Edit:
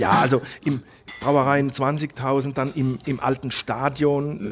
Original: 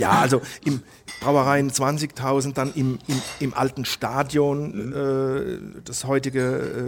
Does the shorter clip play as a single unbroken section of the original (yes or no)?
no